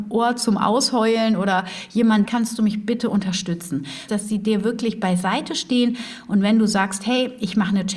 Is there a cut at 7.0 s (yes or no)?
no